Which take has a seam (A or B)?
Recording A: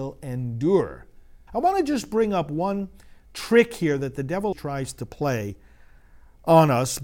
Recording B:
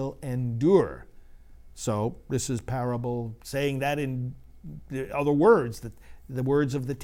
A